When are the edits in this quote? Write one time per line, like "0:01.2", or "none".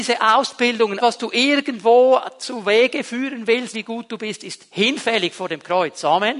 0:01.0
0:03.7

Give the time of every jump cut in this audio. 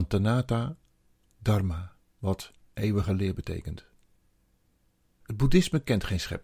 0:05.2

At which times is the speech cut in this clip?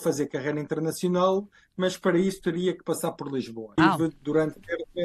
0:03.8

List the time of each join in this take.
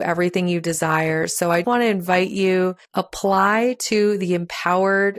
0:01.6
0:02.8

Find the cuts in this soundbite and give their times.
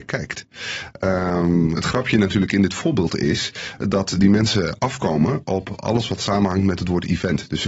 0:01.7

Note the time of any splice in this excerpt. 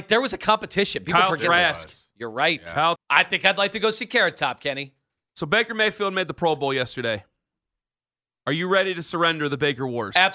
0:02.9

